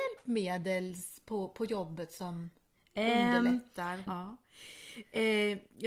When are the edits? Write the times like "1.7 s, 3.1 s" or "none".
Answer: 4.1 s